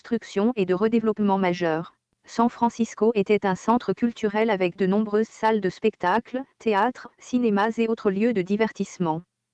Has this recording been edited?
yes; 2 cuts; at 2.1 s, 7.1 s

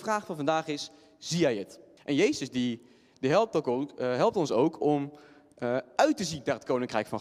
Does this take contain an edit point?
yes; 1 cut; at 2.0 s

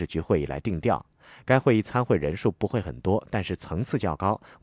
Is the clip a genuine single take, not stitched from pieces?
yes; 0 cuts

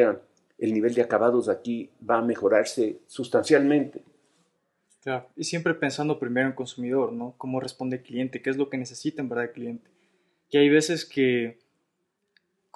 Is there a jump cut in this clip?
no; 0 cuts

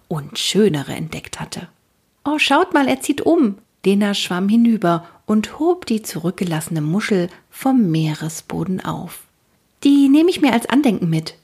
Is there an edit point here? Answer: no; 0 cuts

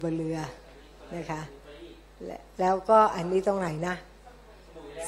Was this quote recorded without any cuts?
yes; 0 cuts

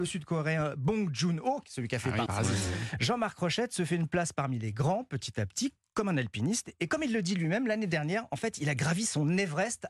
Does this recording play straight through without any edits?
no; 1 cut; at 2.3 s

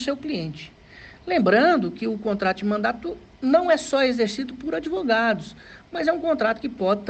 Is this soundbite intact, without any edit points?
yes; 0 cuts

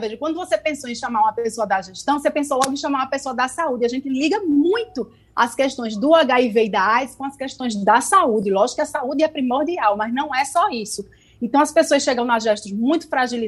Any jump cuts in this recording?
no; 0 cuts

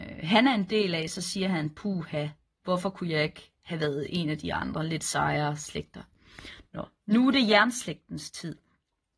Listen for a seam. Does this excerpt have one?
no; 0 cuts

